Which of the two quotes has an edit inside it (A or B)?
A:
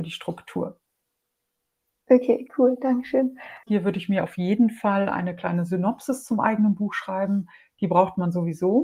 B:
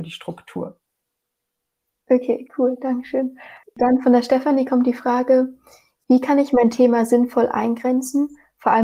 A